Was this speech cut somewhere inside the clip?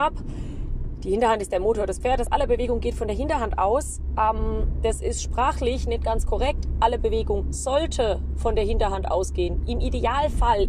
no; 0 cuts

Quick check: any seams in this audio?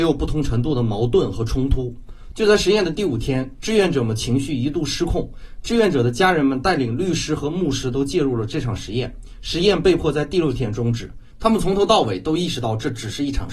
yes; 1 cut; at 11.3 s

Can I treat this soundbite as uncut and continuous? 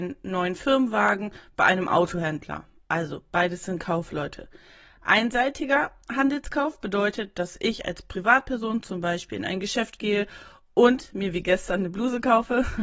yes; 0 cuts

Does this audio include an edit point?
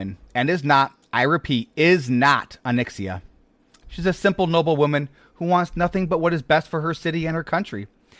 no; 0 cuts

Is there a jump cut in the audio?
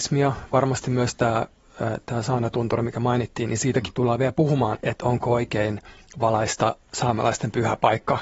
yes; 1 cut; at 4.7 s

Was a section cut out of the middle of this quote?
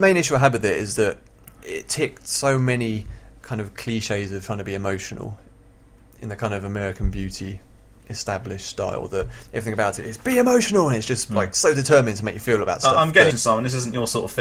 yes; 1 cut; at 13.3 s

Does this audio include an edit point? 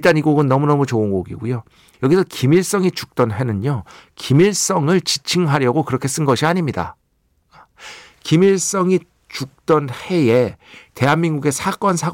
yes; 1 cut; at 1.9 s

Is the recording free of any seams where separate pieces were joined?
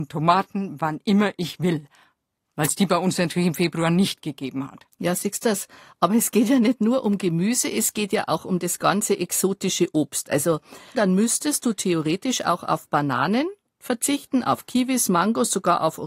no; 1 cut; at 10.9 s

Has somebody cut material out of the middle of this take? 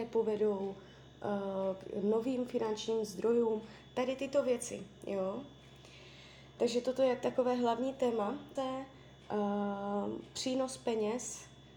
yes; 2 cuts; at 6.6 s, 8.6 s

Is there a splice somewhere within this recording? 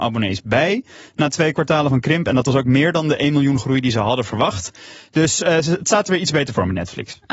no; 0 cuts

